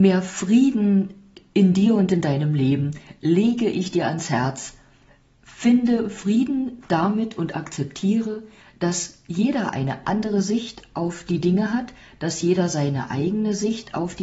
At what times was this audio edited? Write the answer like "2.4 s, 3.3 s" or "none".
none